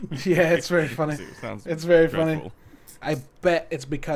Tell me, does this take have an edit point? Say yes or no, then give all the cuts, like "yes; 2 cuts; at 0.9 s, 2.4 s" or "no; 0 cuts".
yes; 2 cuts; at 1.2 s, 3.0 s